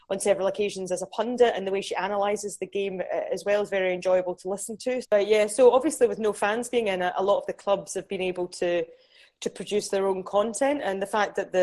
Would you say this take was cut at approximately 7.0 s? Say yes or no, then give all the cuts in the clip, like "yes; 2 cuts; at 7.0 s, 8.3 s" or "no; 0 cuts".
no; 1 cut; at 5.0 s